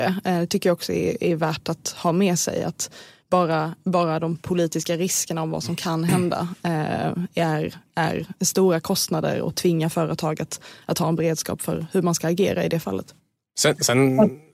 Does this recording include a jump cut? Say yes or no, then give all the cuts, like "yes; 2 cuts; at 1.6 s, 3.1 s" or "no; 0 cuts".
no; 0 cuts